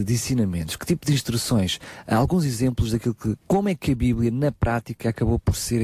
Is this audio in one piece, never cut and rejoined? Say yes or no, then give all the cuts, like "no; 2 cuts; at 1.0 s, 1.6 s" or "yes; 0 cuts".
no; 1 cut; at 3.4 s